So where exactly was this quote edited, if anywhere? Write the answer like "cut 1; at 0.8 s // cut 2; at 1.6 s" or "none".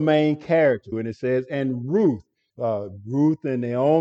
cut 1; at 0.9 s // cut 2; at 2.5 s